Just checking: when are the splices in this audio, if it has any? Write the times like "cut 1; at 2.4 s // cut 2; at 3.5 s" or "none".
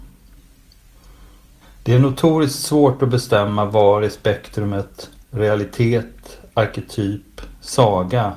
cut 1; at 1.6 s